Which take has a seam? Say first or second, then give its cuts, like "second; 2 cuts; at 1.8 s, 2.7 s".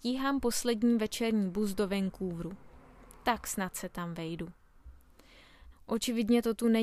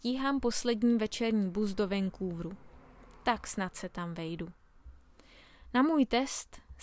first; 1 cut; at 5.7 s